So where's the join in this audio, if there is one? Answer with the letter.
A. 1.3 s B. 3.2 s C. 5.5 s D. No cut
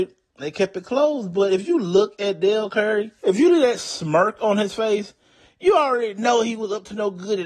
B